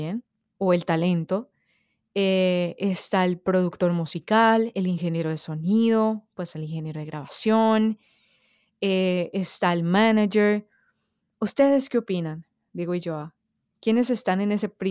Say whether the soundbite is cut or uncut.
uncut